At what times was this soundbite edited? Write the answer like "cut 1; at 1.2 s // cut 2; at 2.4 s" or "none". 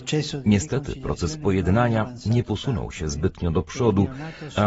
none